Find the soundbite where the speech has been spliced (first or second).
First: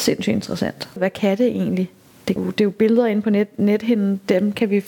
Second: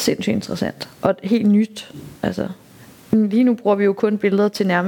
first